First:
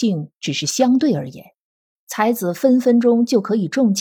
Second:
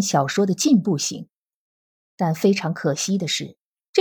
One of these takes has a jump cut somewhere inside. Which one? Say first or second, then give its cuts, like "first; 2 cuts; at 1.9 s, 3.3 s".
first; 1 cut; at 1.9 s